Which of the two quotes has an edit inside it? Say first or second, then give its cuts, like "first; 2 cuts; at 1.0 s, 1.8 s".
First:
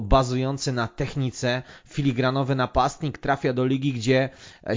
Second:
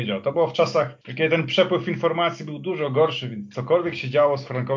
second; 1 cut; at 1.0 s